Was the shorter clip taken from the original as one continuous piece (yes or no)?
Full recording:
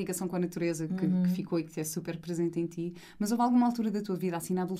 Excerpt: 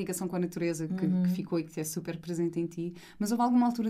yes